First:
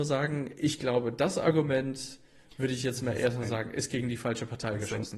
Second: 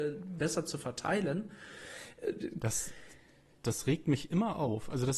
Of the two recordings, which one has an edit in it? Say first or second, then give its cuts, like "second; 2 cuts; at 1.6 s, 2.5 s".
second; 1 cut; at 2.6 s